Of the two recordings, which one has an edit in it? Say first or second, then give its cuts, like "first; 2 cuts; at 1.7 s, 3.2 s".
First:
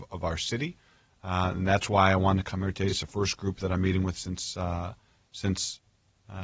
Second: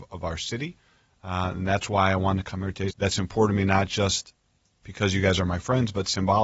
second; 2 cuts; at 2.9 s, 4.8 s